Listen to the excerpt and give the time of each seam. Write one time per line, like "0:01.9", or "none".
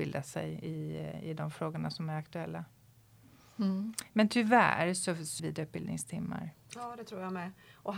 0:05.4
0:06.7